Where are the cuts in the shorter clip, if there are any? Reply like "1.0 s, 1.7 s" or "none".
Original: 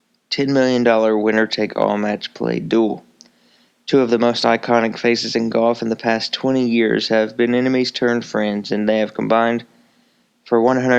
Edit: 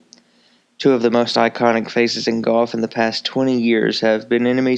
none

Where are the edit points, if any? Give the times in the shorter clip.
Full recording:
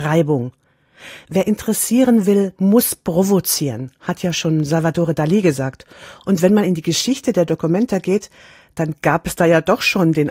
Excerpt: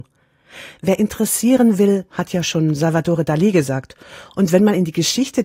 2.1 s

